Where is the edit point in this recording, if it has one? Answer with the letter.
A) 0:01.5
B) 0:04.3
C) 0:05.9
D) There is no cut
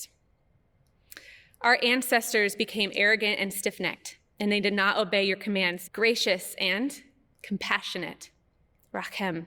C